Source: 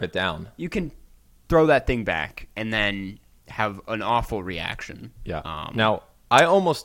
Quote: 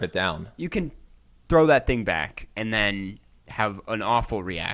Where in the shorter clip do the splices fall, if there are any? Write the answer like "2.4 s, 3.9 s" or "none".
none